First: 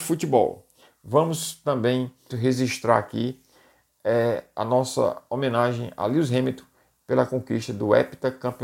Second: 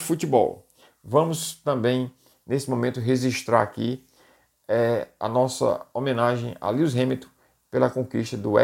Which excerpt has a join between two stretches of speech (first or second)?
first